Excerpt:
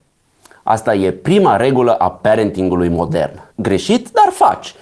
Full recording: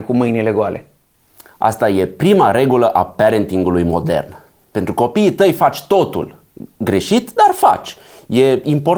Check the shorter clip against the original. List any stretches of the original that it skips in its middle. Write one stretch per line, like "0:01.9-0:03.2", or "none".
0:04.4-0:06.7